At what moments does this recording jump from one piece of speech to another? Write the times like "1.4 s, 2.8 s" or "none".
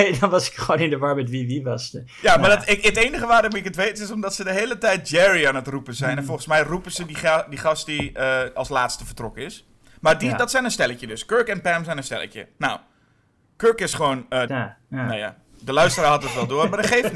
14.5 s